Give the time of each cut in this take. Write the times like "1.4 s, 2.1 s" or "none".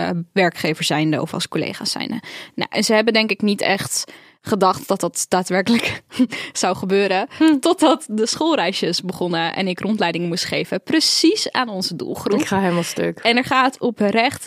none

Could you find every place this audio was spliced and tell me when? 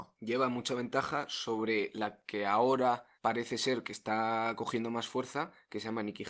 3.1 s

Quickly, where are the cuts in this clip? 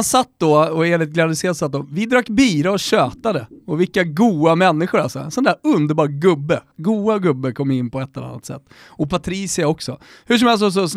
none

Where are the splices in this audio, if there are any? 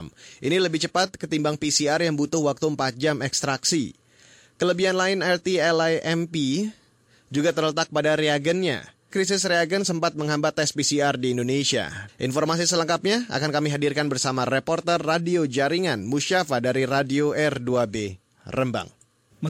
9.1 s, 12.1 s

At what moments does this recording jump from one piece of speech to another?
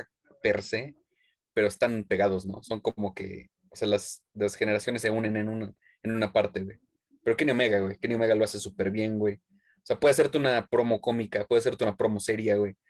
none

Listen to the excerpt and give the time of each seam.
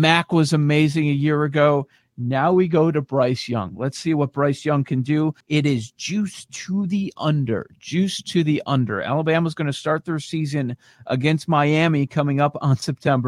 5.4 s

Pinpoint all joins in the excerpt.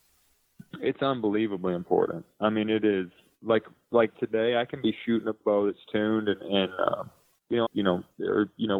4.1 s, 7.7 s

